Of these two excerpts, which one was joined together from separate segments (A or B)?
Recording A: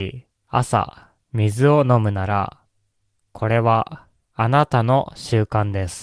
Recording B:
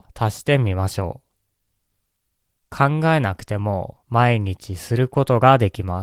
B